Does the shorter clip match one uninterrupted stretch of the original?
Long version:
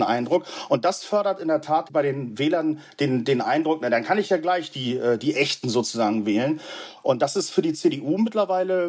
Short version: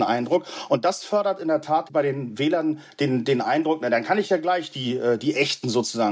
yes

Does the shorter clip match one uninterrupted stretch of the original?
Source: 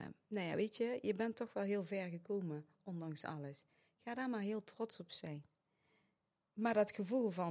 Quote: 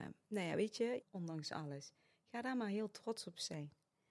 no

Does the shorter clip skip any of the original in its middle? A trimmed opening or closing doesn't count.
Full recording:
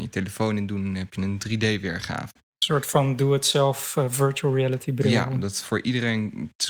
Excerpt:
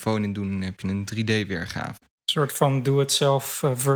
no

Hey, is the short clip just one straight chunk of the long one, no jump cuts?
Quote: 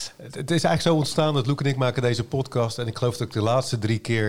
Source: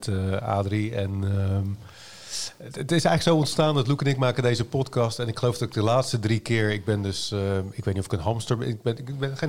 yes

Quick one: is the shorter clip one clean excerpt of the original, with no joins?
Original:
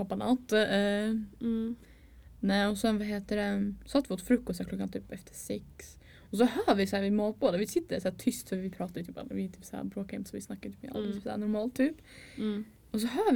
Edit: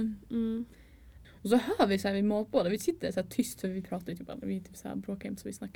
no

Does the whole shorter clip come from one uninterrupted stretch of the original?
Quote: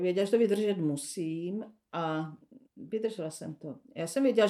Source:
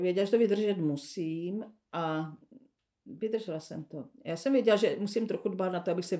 no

